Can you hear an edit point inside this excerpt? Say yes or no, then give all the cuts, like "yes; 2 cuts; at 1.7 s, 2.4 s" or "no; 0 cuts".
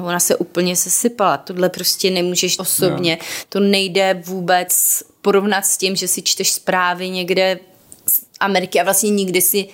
yes; 1 cut; at 2.6 s